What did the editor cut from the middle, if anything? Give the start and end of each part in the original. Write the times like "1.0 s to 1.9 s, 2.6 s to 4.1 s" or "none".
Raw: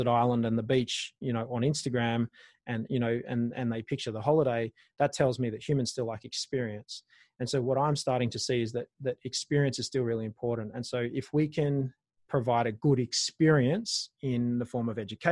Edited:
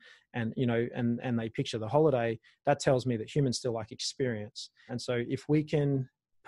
7.2 s to 10.7 s